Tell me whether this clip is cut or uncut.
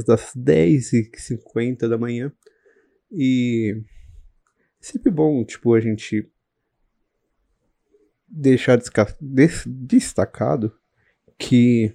uncut